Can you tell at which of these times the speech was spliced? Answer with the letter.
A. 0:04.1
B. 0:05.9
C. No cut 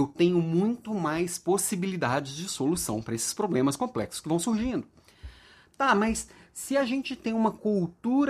C